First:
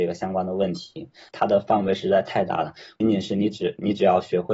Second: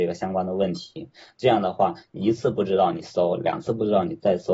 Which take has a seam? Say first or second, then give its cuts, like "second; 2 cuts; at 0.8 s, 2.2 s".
first; 2 cuts; at 1.3 s, 3.0 s